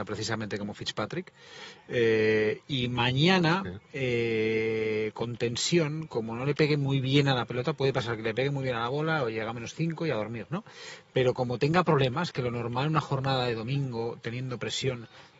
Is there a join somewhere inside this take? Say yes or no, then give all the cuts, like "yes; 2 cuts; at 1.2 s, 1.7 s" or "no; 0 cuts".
no; 0 cuts